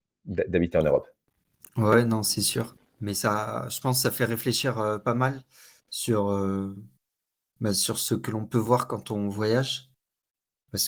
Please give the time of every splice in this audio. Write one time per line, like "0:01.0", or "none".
none